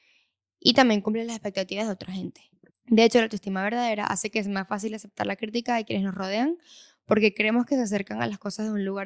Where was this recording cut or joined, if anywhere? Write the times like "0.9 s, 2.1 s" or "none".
2.7 s